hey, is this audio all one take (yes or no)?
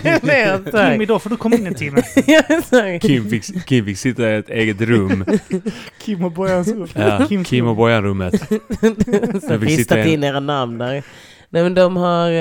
no